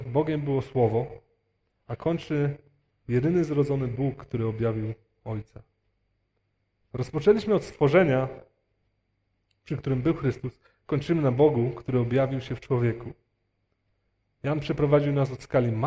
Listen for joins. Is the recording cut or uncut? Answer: uncut